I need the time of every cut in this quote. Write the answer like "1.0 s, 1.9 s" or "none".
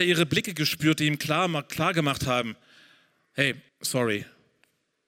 3.7 s